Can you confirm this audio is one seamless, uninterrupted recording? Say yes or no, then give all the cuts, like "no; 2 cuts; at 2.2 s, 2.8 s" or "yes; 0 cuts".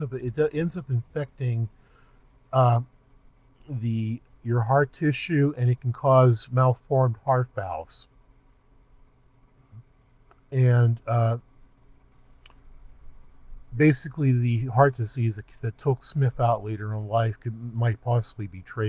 yes; 0 cuts